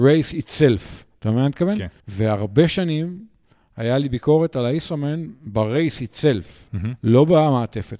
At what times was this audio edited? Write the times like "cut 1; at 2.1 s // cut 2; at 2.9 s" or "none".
cut 1; at 2.0 s

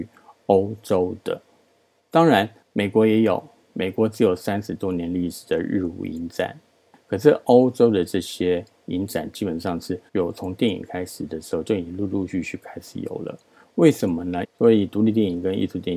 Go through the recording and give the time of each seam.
cut 1; at 10.1 s // cut 2; at 14.4 s

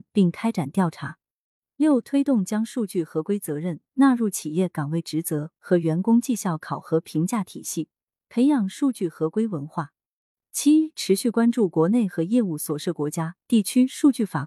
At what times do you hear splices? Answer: none

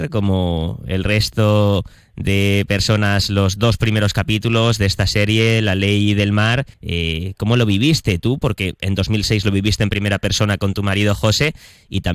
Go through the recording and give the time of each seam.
cut 1; at 6.7 s

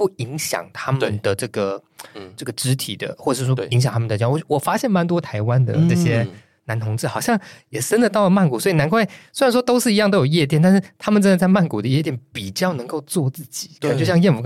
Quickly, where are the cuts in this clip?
none

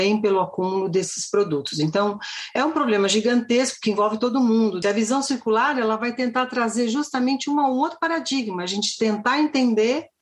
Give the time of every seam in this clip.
cut 1; at 4.8 s

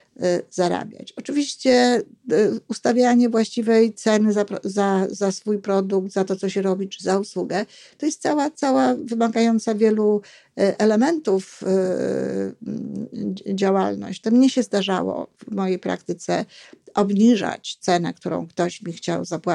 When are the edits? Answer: cut 1; at 14.2 s

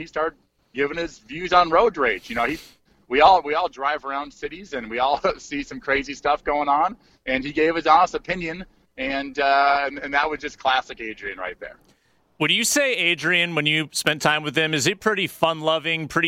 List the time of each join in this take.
none

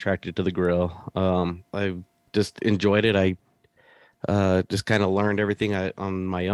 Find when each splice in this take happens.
cut 1; at 1.7 s

